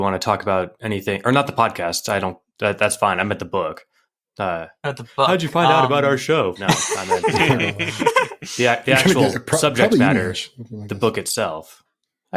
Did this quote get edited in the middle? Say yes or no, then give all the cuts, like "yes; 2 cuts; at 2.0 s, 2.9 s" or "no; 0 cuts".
yes; 1 cut; at 6.6 s